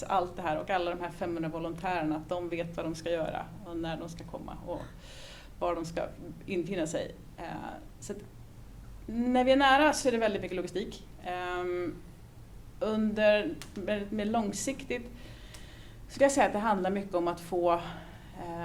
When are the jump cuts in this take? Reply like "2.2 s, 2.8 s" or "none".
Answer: none